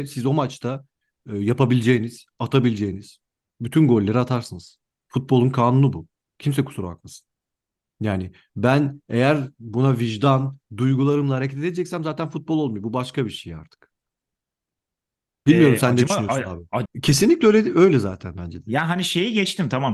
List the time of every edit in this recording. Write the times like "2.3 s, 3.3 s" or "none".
10.6 s, 16.8 s